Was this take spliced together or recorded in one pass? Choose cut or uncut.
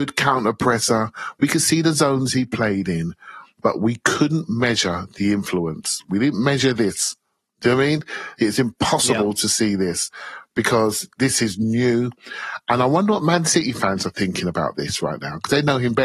uncut